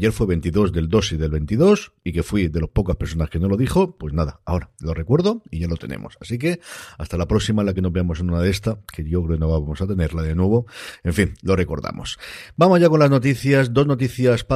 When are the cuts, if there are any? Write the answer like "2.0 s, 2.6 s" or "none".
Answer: none

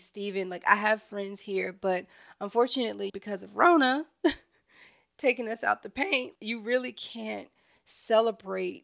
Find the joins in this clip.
3.1 s, 6.4 s

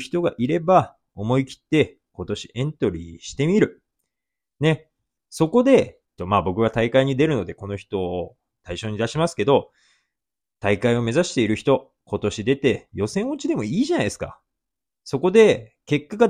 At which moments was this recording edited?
6.2 s

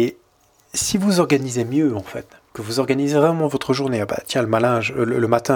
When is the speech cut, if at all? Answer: 2.5 s

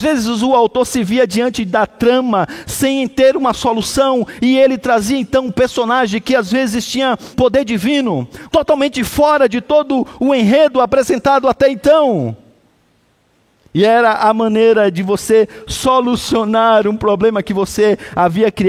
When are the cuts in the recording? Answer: 7.3 s, 8.5 s

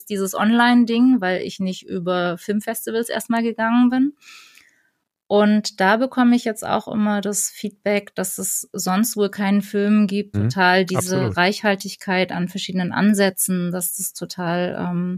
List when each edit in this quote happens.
10.3 s

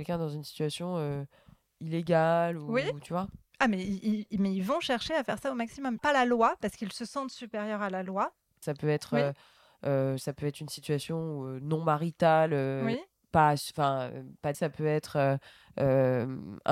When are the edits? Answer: 6.0 s, 8.6 s, 14.5 s

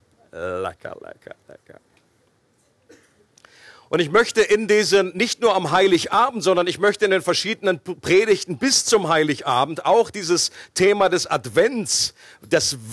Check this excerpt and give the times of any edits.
none

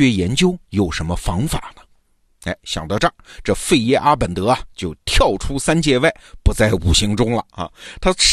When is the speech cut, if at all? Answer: none

